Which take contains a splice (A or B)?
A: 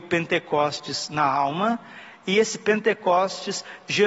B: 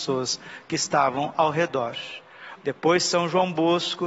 B